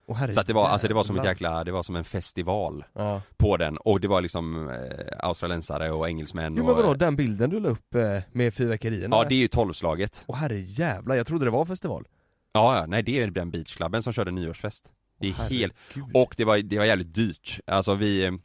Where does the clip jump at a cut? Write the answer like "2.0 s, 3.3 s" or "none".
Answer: 10.2 s